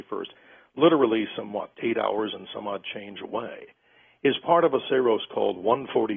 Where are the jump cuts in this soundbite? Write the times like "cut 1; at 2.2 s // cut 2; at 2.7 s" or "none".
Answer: cut 1; at 1.8 s